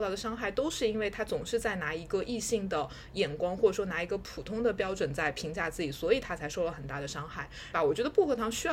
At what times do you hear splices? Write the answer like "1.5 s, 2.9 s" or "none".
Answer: 7.7 s

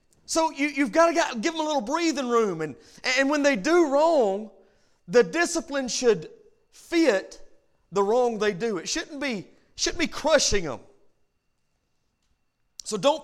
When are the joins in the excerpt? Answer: none

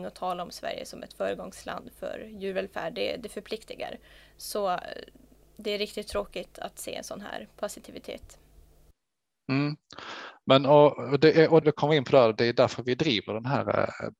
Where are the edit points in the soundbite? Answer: 11.6 s

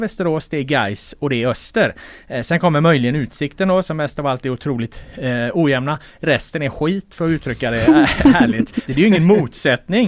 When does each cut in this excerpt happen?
8.9 s

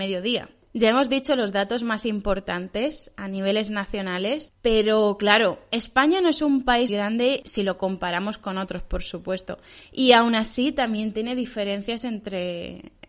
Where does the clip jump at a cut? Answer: 6.9 s

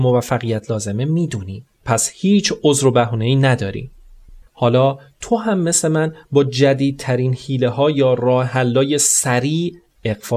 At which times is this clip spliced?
1.7 s, 4.5 s

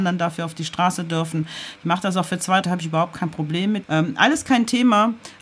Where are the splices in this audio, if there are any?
2.6 s, 3.8 s

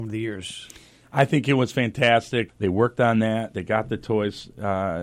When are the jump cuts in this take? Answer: 2.5 s, 3.5 s

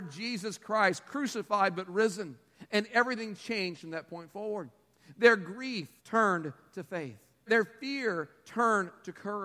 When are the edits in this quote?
6.0 s, 7.5 s

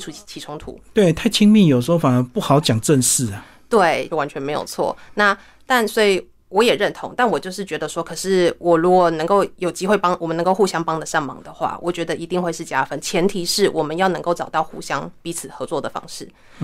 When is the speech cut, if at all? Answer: 4.1 s

